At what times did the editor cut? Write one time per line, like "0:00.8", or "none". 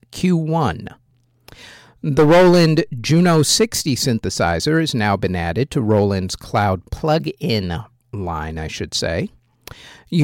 0:06.9